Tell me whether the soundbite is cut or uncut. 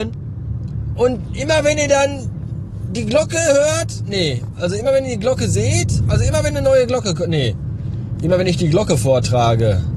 uncut